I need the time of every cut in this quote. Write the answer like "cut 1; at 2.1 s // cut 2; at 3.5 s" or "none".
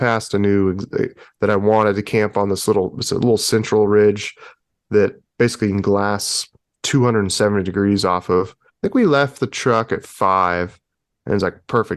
cut 1; at 8.7 s